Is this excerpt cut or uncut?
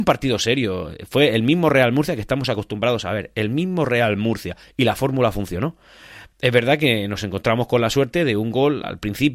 uncut